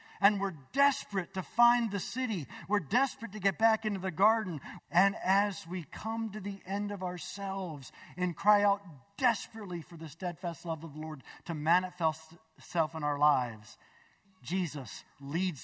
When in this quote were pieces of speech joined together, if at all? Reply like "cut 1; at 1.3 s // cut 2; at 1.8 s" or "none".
cut 1; at 4.8 s // cut 2; at 14.2 s